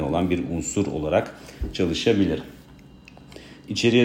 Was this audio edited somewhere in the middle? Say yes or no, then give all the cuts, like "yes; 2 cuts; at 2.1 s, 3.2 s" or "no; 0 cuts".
no; 0 cuts